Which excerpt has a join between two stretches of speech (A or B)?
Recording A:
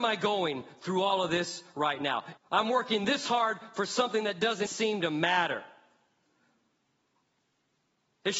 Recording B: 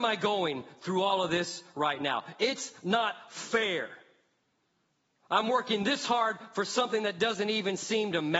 A